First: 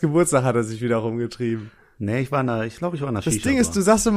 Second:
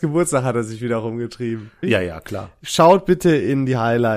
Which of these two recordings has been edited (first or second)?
second